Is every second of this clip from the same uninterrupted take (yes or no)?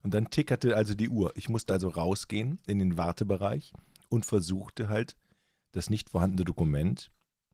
yes